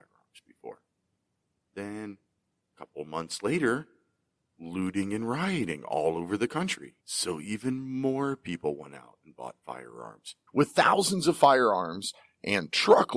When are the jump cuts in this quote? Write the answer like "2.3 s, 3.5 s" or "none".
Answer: 7.0 s, 10.5 s